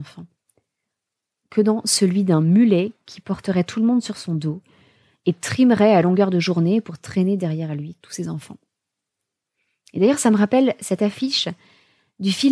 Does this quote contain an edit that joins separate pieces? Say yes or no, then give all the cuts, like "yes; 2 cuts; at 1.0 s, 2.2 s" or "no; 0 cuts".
no; 0 cuts